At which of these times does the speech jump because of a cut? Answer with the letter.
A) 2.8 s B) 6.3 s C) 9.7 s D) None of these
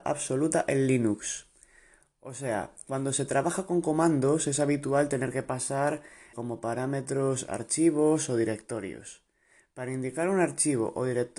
B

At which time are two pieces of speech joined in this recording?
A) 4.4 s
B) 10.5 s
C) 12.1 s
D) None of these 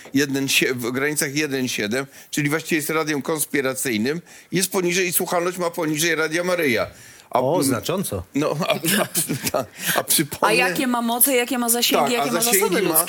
D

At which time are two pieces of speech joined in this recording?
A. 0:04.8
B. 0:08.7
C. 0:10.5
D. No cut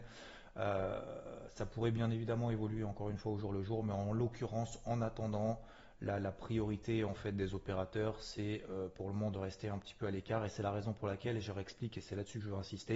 D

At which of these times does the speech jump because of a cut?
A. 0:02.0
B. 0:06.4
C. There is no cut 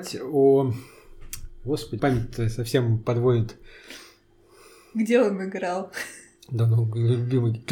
A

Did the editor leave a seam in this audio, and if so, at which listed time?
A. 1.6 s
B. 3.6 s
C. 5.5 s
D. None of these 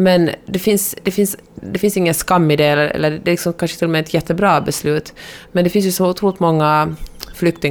A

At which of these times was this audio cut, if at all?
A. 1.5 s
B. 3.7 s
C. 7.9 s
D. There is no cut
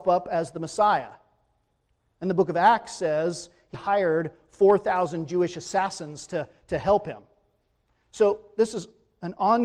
B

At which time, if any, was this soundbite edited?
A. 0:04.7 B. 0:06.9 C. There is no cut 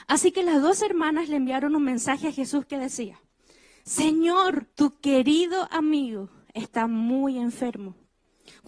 A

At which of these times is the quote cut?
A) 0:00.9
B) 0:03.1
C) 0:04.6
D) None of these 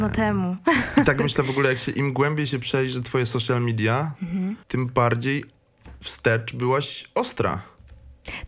C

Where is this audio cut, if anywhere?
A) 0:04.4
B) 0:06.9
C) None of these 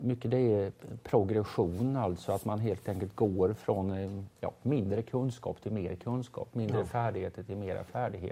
A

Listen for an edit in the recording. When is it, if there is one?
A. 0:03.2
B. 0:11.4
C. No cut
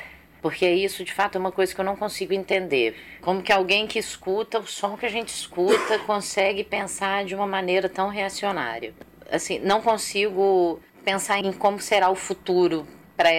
B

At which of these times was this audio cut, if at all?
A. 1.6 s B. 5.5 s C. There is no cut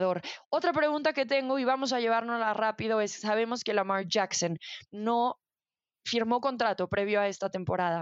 C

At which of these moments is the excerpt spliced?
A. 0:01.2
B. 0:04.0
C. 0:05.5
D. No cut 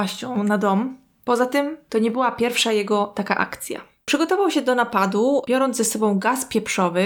B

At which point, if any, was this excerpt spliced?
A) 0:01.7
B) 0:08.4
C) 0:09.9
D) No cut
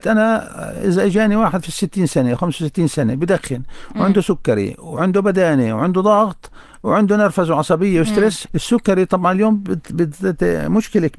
B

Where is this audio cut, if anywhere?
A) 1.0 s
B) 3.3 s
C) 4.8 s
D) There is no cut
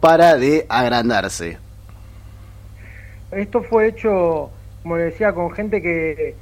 B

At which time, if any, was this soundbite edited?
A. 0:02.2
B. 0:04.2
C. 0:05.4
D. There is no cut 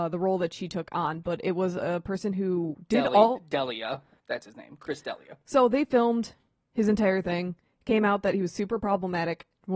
B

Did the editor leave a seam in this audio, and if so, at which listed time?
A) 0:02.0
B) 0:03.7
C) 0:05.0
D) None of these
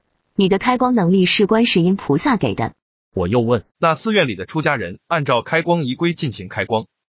B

